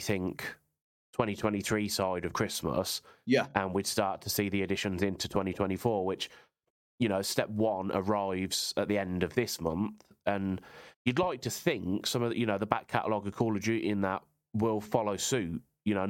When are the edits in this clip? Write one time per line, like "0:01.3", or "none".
none